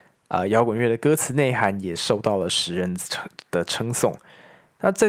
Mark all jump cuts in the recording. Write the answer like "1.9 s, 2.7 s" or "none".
none